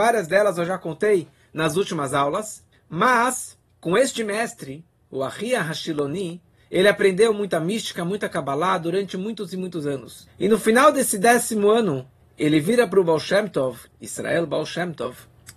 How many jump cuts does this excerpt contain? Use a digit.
2